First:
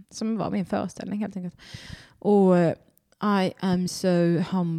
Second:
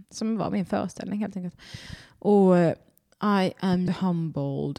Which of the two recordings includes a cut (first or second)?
second